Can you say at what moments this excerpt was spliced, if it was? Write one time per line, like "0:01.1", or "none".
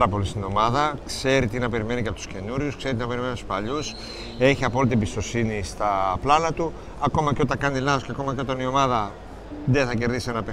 none